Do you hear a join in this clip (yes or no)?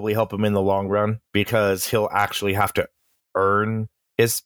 yes